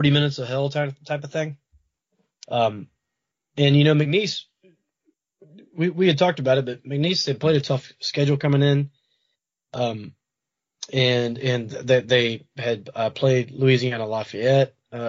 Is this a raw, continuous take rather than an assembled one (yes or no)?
no